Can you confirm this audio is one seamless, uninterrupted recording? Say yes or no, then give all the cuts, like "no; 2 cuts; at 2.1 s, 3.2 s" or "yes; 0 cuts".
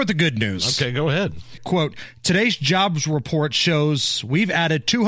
no; 1 cut; at 1.6 s